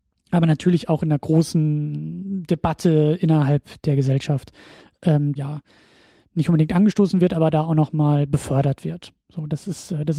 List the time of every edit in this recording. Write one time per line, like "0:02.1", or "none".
0:05.4

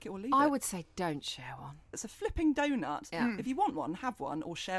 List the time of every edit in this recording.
0:01.9

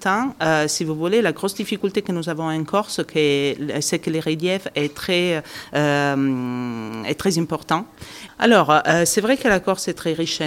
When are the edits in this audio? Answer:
0:08.3

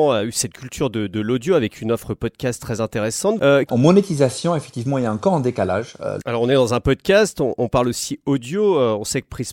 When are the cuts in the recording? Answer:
0:03.7
0:06.2

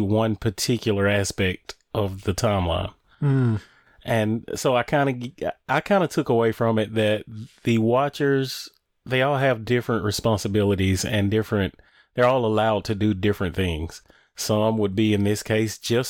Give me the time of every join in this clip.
none

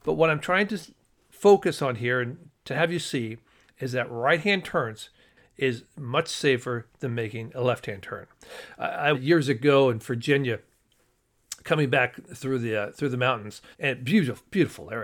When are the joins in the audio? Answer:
0:09.1
0:13.7

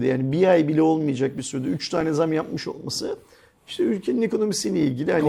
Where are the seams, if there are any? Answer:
none

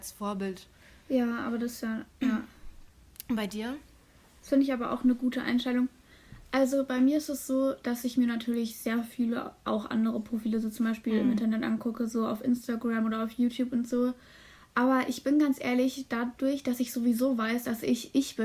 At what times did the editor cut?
none

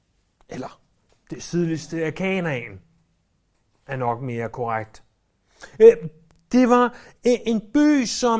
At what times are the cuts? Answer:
none

